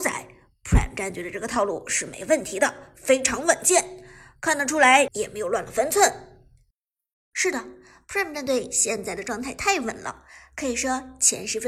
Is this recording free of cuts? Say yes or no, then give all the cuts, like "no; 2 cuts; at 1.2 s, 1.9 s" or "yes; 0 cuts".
no; 2 cuts; at 5.1 s, 7.1 s